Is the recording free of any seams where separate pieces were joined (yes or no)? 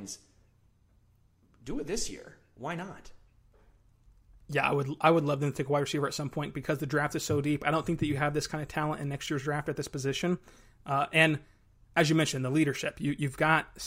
yes